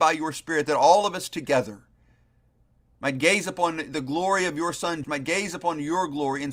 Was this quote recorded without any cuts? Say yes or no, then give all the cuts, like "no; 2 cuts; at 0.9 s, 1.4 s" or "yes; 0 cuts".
no; 1 cut; at 5.0 s